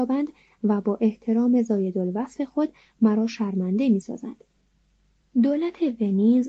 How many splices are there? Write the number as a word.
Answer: one